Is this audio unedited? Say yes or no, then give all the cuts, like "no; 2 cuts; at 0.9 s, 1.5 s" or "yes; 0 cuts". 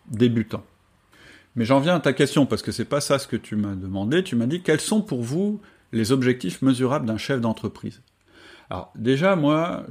yes; 0 cuts